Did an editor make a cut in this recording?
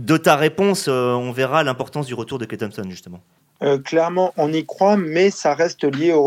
no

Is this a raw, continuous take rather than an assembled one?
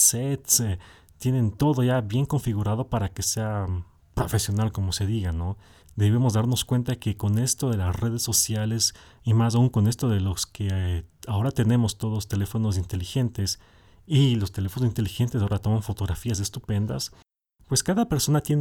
no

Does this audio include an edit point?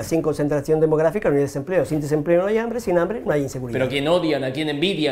no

